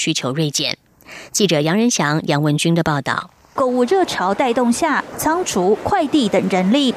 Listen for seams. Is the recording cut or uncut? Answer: cut